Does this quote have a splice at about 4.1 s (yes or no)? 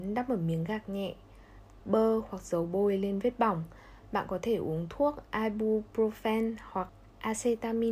no